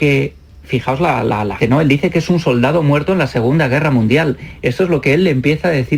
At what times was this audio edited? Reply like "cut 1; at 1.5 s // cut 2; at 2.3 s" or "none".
cut 1; at 1.6 s